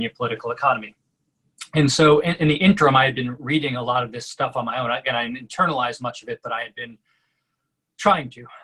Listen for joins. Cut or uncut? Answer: uncut